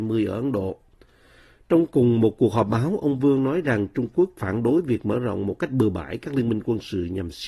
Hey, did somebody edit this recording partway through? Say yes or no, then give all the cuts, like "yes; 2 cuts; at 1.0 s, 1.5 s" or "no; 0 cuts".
no; 0 cuts